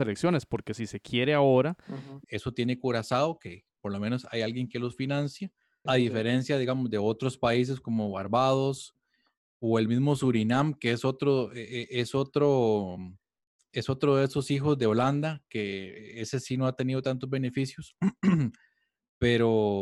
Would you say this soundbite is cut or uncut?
cut